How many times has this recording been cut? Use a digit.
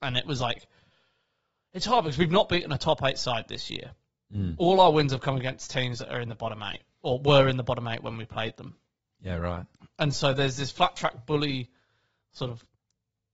0